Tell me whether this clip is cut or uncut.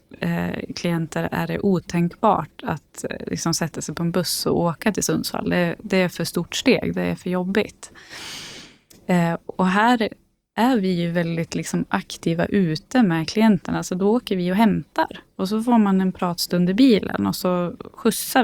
uncut